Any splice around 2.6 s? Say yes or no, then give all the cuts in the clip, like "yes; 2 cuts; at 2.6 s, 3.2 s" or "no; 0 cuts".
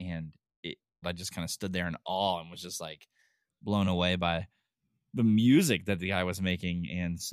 no; 1 cut; at 1.0 s